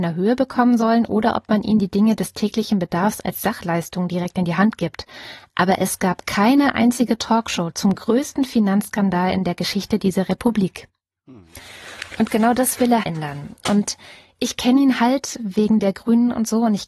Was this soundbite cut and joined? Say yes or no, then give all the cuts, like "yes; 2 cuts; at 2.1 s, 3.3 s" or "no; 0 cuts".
yes; 1 cut; at 13.0 s